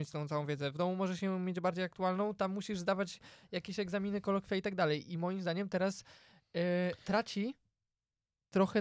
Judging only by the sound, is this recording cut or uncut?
uncut